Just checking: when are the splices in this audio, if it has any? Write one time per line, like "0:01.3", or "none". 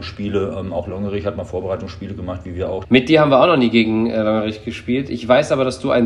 0:02.8